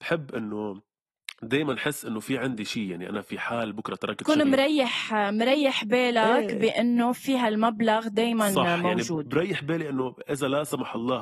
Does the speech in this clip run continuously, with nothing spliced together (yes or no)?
yes